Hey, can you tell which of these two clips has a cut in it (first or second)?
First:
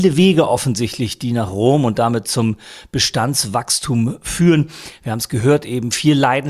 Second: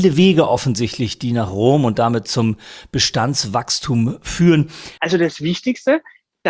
second